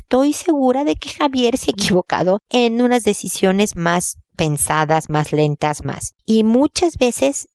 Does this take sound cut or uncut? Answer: uncut